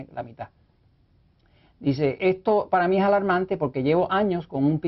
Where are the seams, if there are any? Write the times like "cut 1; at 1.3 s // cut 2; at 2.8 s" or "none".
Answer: cut 1; at 2.2 s